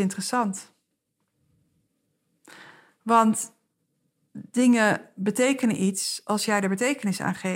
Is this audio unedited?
yes; 0 cuts

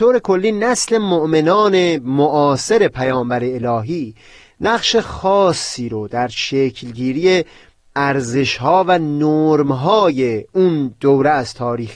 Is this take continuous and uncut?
yes; 0 cuts

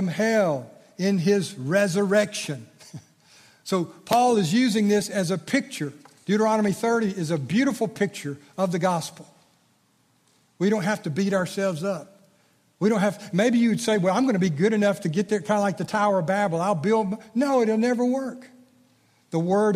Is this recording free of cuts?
yes; 0 cuts

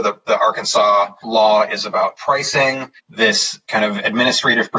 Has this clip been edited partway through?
yes; 2 cuts; at 1.2 s, 3.0 s

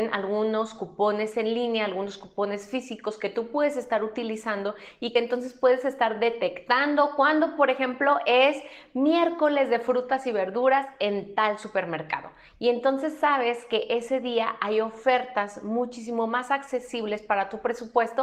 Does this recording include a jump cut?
no; 0 cuts

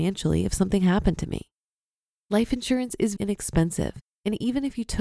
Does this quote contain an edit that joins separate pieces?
yes; 2 cuts; at 2.1 s, 3.2 s

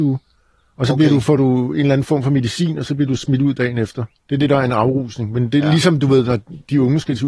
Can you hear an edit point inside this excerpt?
yes; 1 cut; at 4.1 s

